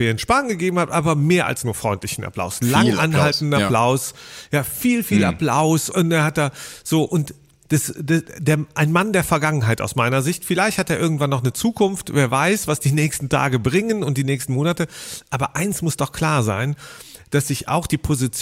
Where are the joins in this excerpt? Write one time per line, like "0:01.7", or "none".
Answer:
0:05.9